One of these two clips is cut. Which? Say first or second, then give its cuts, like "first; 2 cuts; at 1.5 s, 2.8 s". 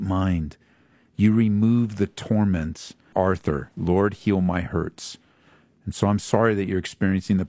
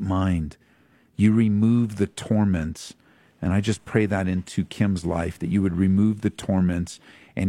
first; 1 cut; at 3.1 s